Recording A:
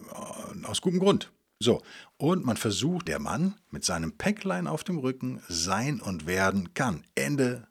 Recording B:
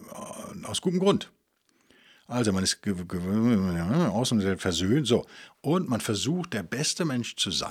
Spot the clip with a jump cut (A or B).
A